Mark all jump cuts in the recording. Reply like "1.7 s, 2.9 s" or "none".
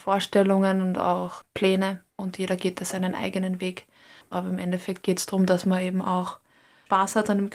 2.1 s